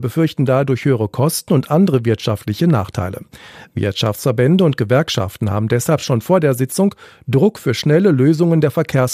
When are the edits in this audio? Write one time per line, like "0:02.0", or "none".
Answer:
none